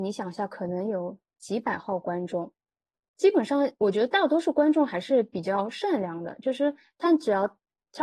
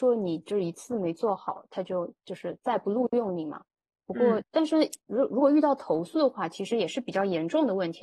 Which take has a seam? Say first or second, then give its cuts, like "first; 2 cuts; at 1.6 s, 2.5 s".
second; 1 cut; at 4.4 s